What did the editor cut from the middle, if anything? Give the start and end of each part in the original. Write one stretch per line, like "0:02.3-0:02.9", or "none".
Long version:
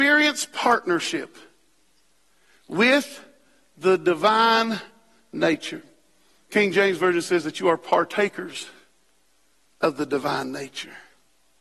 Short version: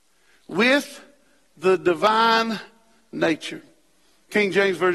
none